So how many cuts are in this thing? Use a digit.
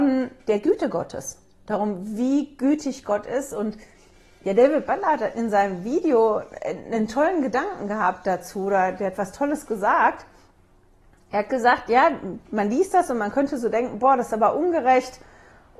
0